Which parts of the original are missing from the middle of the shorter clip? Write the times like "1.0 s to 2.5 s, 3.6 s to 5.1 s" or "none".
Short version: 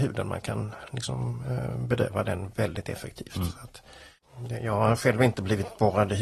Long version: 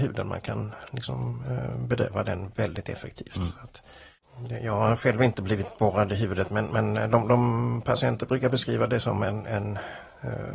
none